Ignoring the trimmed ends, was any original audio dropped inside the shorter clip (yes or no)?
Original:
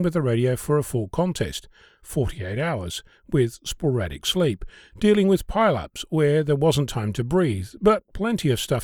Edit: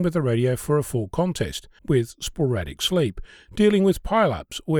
yes